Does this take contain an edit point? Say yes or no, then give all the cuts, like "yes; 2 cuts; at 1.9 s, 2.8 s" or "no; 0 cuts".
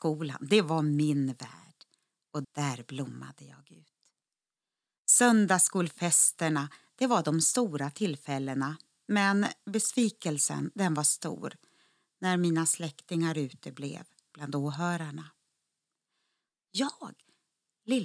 yes; 2 cuts; at 2.4 s, 16.5 s